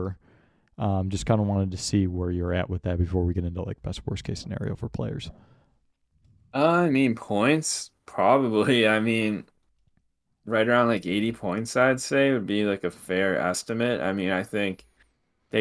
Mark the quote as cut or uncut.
uncut